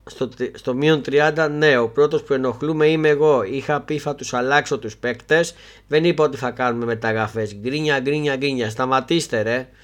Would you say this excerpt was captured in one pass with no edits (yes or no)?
yes